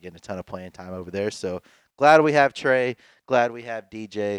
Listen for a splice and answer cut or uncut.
uncut